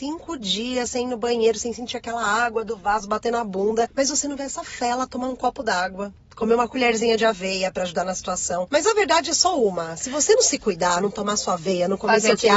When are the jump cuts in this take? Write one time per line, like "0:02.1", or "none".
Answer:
0:11.0